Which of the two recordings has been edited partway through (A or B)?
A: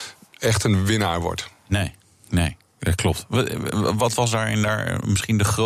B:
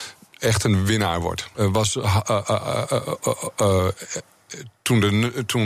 B